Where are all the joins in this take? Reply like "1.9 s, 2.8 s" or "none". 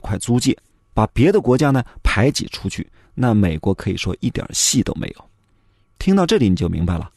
none